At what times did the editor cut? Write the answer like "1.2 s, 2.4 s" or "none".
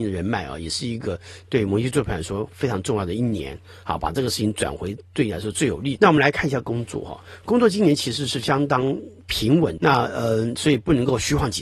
6.0 s, 9.8 s